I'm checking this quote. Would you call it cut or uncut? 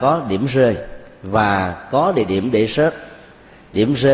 uncut